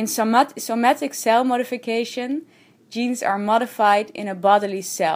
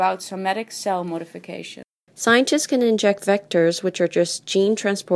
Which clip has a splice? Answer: second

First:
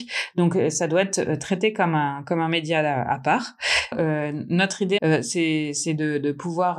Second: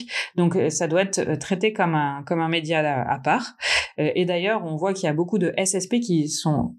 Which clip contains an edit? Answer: first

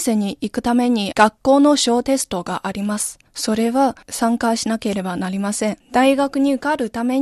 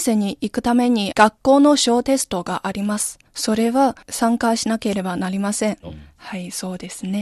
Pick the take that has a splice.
second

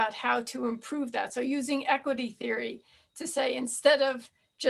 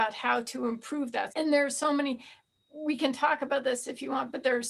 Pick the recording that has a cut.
second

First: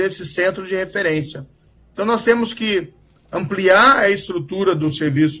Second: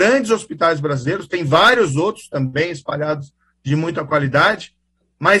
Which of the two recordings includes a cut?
first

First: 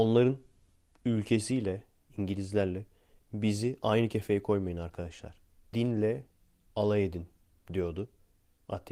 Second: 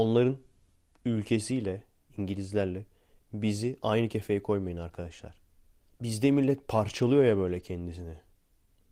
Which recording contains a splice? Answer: first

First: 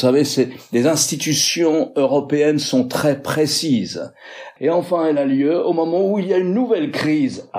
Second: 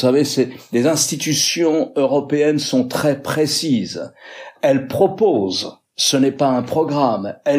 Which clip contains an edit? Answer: first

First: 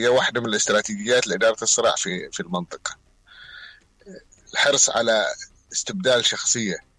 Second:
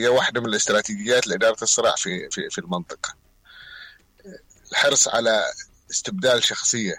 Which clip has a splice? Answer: first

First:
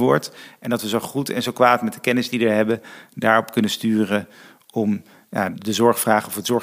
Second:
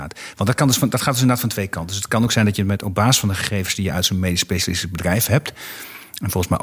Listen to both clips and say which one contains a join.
first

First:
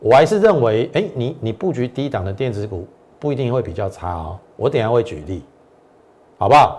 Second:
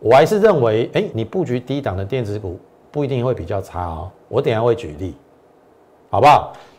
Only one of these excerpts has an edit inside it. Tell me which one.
second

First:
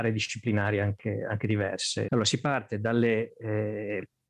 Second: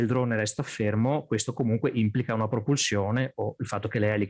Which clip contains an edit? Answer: first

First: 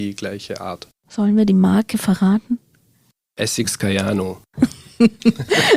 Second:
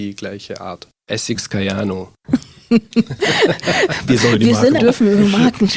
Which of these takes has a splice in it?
second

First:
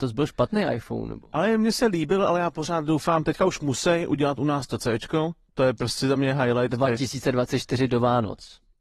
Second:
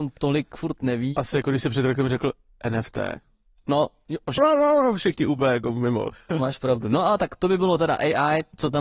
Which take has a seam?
second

